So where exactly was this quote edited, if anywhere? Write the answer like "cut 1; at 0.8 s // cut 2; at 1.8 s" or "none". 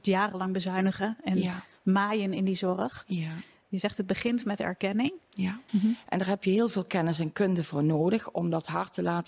cut 1; at 5.7 s